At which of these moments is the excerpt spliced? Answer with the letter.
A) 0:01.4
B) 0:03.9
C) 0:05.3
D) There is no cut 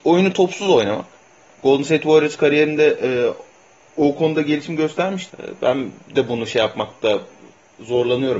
C